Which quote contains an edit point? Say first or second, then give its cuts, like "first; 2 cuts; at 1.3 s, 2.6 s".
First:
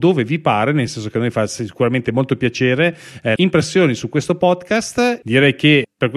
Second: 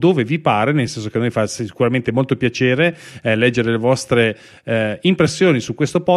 first; 2 cuts; at 3.4 s, 5.2 s